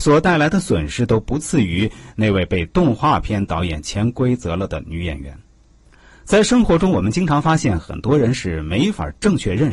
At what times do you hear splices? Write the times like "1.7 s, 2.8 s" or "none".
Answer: none